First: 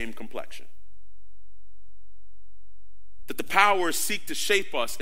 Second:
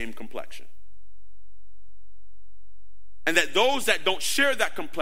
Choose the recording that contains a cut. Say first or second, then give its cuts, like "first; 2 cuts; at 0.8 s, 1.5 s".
first; 1 cut; at 3.2 s